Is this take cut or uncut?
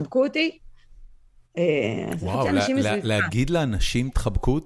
uncut